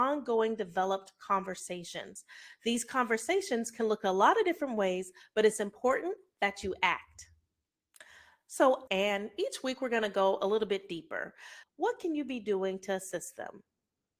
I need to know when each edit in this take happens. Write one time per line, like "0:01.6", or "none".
0:08.9
0:11.6